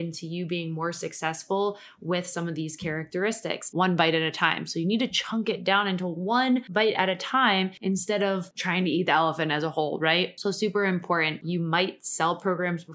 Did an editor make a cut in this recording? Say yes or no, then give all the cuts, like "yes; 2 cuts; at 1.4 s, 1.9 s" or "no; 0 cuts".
yes; 2 cuts; at 3.7 s, 11.4 s